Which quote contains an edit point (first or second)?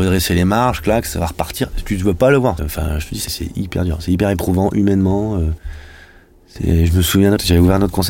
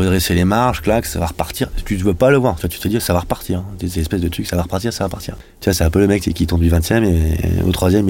first